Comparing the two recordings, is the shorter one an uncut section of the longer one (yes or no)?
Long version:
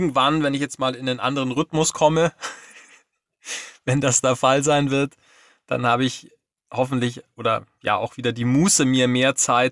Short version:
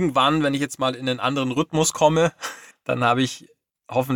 no